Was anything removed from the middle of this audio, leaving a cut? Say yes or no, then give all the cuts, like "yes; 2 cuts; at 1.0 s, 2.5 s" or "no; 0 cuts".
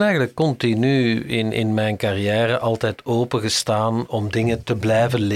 no; 0 cuts